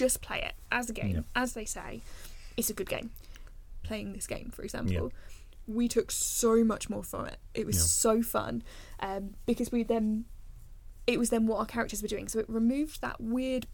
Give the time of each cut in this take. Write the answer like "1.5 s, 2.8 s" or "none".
3.8 s